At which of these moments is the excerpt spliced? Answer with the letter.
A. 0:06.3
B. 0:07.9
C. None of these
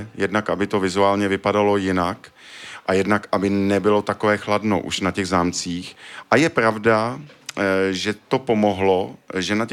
C